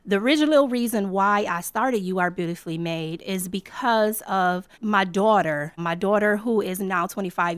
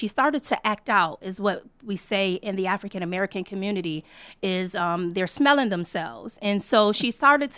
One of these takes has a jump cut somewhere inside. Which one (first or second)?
first